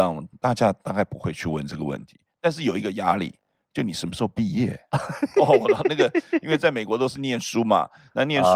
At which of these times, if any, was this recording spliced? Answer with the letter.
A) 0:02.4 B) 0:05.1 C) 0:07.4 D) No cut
D